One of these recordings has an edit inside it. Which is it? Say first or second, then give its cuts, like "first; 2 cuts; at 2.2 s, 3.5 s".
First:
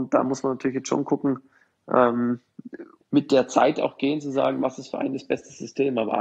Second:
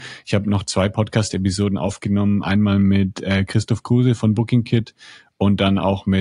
first; 1 cut; at 3.0 s